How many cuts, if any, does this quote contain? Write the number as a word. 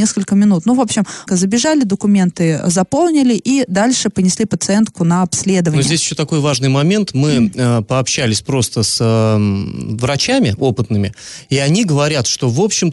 one